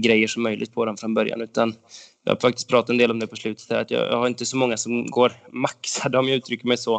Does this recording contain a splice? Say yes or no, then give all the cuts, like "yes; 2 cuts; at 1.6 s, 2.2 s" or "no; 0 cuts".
no; 0 cuts